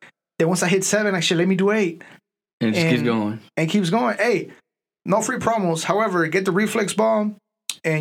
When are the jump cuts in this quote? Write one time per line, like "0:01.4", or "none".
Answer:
none